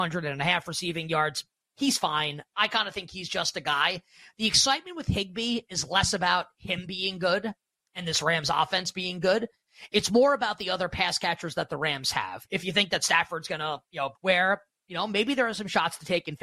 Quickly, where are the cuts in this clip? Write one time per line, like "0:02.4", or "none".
0:12.5
0:14.1